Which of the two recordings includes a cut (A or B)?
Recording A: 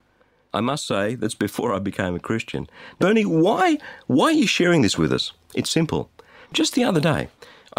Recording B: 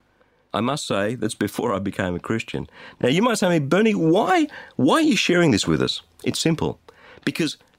A